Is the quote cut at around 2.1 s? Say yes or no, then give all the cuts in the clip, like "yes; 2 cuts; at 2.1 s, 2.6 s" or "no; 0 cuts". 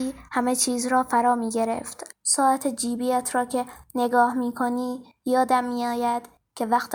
yes; 1 cut; at 2.1 s